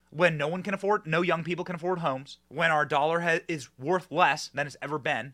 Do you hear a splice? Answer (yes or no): yes